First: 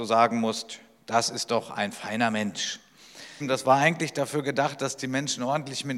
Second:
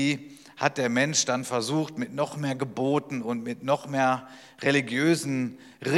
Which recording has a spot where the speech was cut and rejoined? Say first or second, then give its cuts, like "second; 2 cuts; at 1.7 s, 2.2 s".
first; 1 cut; at 3.4 s